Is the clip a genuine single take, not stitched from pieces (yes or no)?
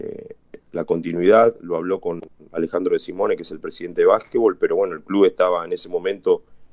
yes